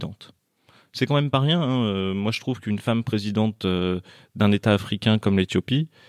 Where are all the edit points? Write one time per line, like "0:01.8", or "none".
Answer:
none